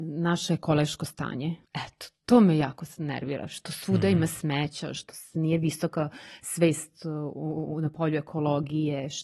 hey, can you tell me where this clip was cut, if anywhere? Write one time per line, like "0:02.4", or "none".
0:01.6

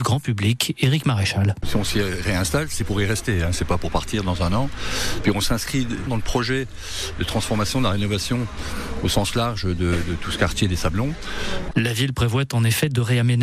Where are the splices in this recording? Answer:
0:06.1
0:11.7

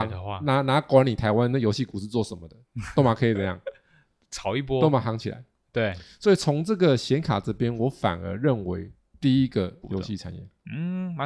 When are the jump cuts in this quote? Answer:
0:09.8

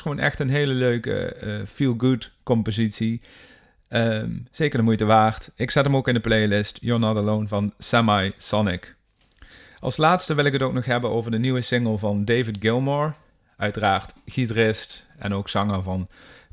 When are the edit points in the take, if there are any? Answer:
none

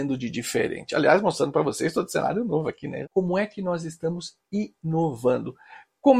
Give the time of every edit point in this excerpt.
0:03.0

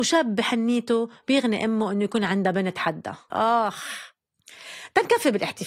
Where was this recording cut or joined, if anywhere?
0:03.3

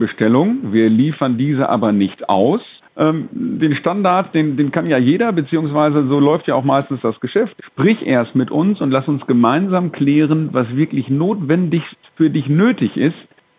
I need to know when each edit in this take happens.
0:02.8
0:07.6

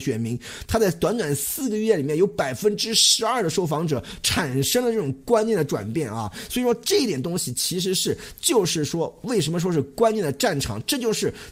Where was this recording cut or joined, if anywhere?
none

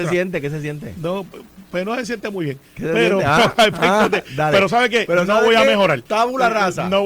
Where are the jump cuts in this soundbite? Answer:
none

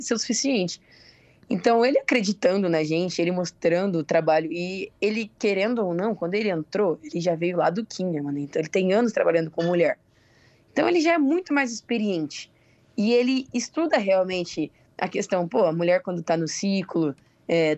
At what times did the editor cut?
none

